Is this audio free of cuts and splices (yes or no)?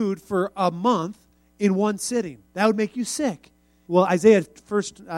no